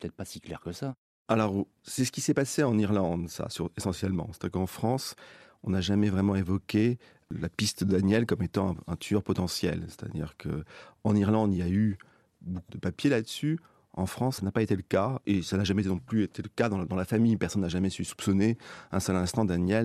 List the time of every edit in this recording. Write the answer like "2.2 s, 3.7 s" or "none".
12.7 s